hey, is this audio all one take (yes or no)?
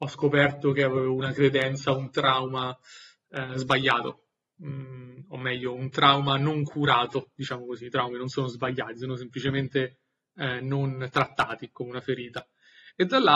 yes